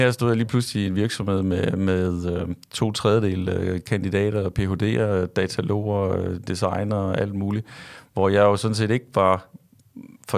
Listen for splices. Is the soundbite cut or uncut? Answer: uncut